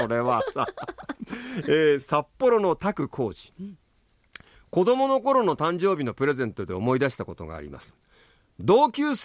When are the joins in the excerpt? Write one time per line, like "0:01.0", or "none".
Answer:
none